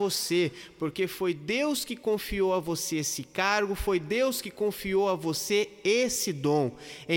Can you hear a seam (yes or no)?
no